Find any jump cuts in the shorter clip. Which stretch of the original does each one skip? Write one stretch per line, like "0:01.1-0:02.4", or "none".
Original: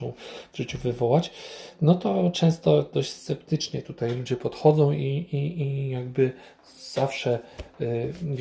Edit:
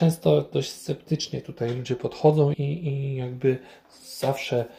0:04.9-0:05.3